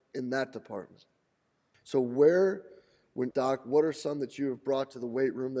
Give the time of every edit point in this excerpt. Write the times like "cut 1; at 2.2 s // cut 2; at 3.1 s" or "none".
cut 1; at 1.7 s // cut 2; at 3.3 s